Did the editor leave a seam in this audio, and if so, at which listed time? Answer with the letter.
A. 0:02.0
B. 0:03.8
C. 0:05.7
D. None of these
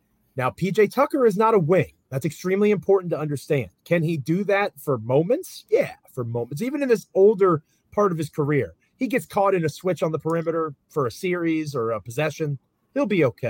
D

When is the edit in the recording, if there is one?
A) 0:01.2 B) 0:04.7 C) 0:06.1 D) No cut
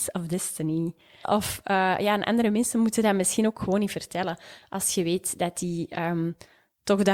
A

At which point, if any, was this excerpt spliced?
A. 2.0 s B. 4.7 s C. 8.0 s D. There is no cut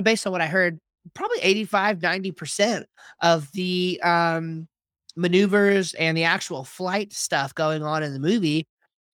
D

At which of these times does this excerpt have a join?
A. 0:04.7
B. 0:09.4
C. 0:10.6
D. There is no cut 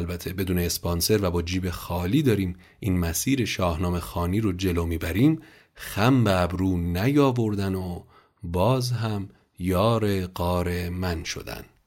D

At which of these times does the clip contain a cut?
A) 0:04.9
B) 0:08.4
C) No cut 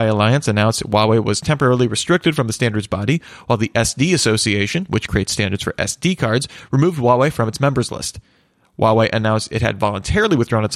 C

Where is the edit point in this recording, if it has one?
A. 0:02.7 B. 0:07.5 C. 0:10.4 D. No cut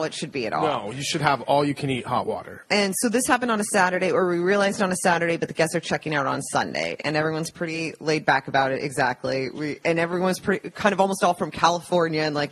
A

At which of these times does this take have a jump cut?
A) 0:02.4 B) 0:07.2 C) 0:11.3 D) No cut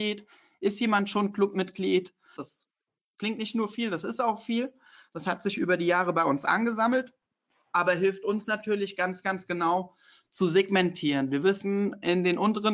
A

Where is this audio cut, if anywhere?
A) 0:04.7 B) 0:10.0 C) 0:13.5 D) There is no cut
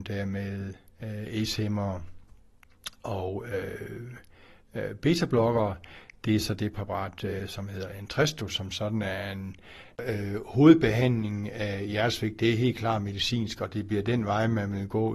B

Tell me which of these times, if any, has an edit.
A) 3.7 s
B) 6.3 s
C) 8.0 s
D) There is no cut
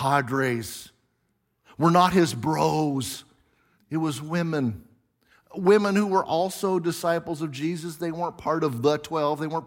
A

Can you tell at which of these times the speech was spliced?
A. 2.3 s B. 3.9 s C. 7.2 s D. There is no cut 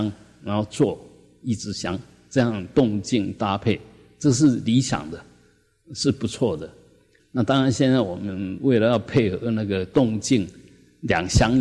C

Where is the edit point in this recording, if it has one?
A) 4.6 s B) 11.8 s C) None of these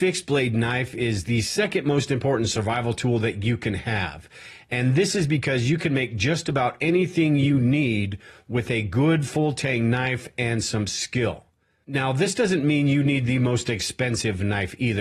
C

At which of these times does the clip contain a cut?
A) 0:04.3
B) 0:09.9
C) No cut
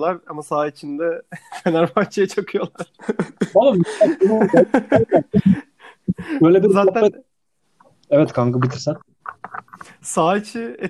C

